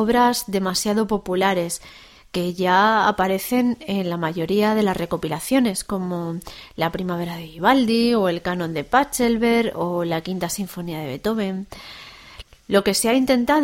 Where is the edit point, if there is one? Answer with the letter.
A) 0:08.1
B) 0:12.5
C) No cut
C